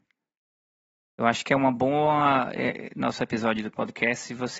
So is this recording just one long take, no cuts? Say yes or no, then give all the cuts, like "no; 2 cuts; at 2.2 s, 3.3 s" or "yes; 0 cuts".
no; 1 cut; at 2.9 s